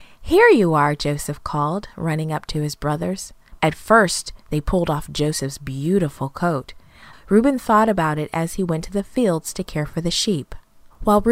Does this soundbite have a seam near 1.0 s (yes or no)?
no